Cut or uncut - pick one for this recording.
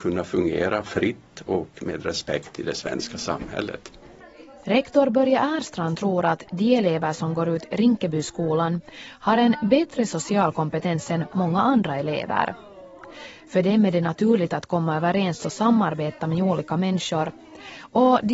uncut